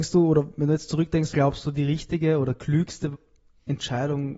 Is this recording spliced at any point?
yes; 1 cut; at 1.3 s

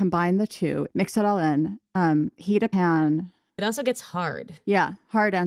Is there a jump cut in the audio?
yes; 1 cut; at 3.6 s

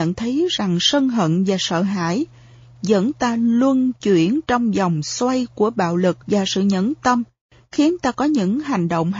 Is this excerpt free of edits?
no; 1 cut; at 6.2 s

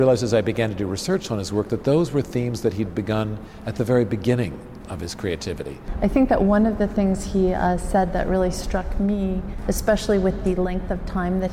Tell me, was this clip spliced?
no; 0 cuts

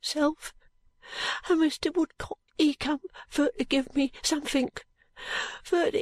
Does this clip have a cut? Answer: yes; 1 cut; at 2.5 s

